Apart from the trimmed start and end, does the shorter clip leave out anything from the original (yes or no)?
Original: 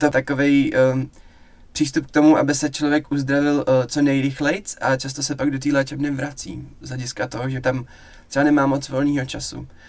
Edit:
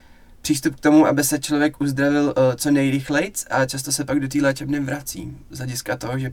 no